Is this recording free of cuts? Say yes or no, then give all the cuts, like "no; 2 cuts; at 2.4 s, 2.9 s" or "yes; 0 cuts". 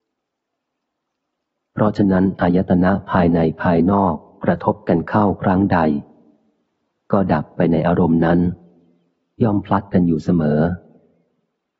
yes; 0 cuts